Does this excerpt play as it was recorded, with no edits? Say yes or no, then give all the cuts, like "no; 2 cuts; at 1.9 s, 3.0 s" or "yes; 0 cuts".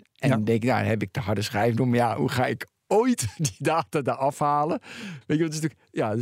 no; 1 cut; at 5.2 s